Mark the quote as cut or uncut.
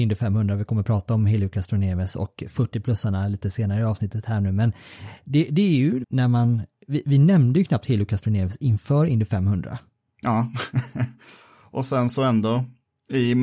cut